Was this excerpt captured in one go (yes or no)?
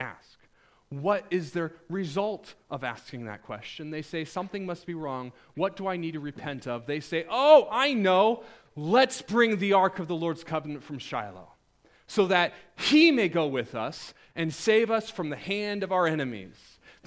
yes